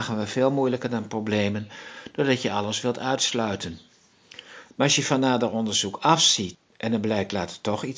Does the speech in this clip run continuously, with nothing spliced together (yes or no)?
no